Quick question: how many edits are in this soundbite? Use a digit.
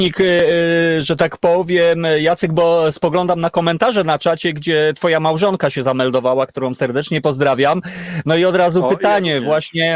0